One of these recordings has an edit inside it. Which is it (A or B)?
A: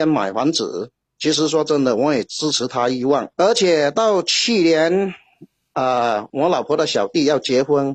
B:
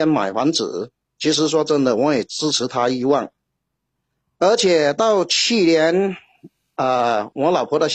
A